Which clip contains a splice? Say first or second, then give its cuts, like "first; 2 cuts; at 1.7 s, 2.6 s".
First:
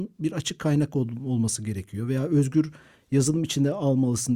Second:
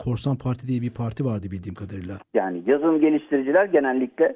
second; 1 cut; at 2.2 s